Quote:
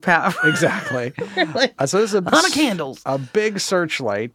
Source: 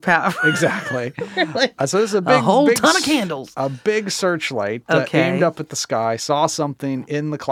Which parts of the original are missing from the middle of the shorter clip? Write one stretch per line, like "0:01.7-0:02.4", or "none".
0:02.3-0:02.8